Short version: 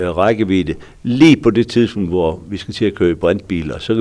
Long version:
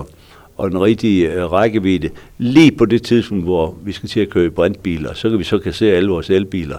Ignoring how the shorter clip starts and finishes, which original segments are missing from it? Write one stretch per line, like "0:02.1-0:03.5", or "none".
none